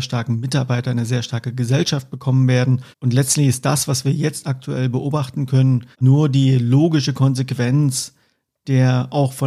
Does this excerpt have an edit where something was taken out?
yes; 2 cuts; at 2.9 s, 5.9 s

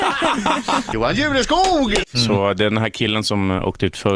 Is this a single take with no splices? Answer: no; 1 cut; at 2.0 s

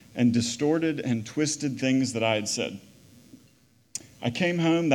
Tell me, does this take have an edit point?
no; 0 cuts

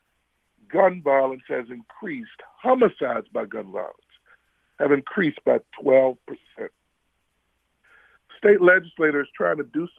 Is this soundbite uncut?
yes; 0 cuts

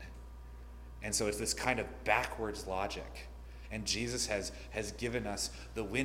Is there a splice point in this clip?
yes; 1 cut; at 3.7 s

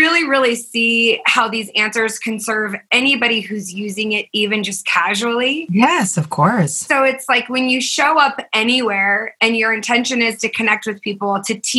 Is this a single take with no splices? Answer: yes; 0 cuts

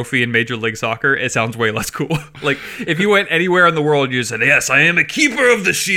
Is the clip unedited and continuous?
yes; 0 cuts

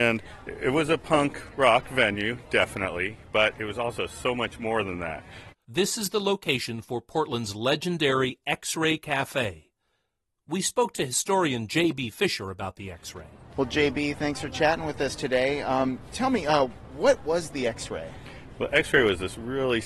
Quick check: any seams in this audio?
yes; 2 cuts; at 5.5 s, 13.5 s

